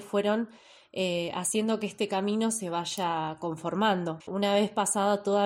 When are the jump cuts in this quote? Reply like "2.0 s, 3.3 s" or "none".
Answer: 4.2 s